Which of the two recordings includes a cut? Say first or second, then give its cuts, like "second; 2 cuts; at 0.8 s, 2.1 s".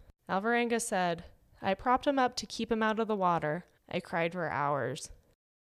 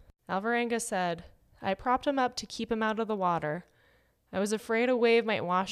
first; 1 cut; at 3.8 s